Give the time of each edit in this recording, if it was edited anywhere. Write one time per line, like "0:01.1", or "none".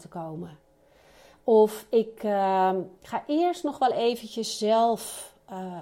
none